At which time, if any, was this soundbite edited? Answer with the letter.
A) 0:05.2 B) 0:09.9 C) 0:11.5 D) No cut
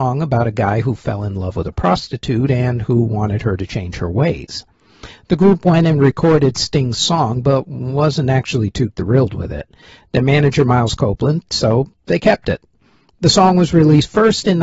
C